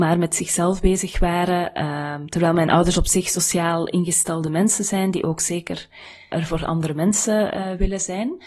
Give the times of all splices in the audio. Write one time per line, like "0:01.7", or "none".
0:06.3